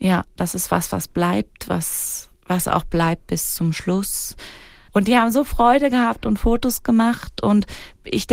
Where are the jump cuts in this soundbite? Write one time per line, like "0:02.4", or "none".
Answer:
0:02.4
0:04.9